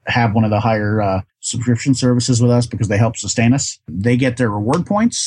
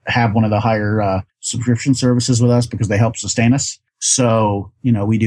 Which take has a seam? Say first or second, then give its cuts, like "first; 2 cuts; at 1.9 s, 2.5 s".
first; 1 cut; at 3.9 s